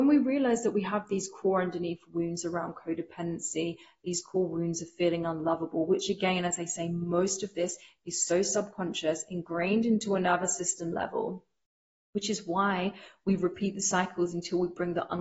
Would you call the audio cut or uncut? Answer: uncut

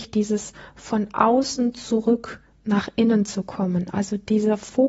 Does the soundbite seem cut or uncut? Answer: uncut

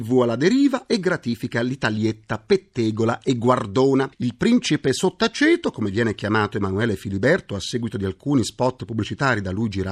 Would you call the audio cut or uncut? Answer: uncut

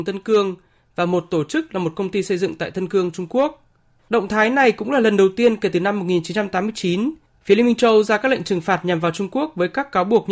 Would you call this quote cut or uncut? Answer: cut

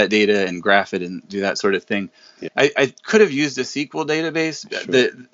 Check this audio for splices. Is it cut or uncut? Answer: cut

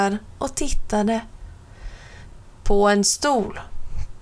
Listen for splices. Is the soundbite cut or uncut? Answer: cut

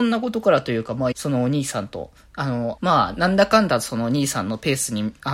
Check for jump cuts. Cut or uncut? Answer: cut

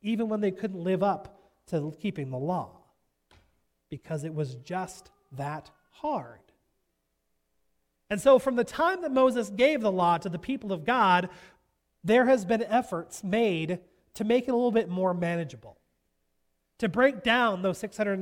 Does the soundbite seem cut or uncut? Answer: uncut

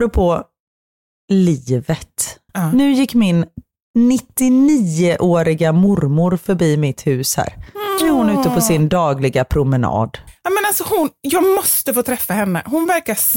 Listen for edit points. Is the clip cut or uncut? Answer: uncut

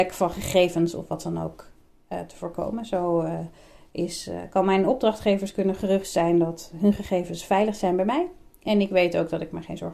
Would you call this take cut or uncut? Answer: uncut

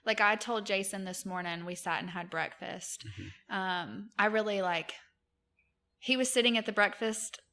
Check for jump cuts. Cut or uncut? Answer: uncut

